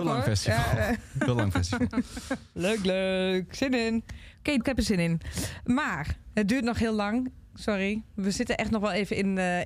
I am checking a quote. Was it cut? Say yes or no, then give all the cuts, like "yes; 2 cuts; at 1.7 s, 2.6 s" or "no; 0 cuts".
yes; 1 cut; at 4.6 s